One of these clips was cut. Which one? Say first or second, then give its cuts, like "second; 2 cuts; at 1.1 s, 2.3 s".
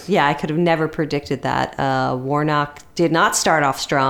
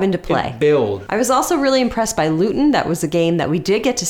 second; 1 cut; at 1.1 s